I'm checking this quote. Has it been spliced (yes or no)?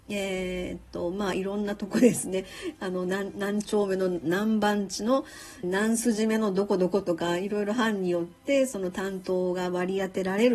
yes